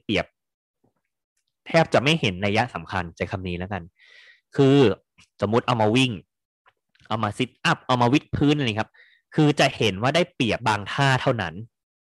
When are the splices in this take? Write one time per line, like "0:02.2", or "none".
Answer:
0:10.6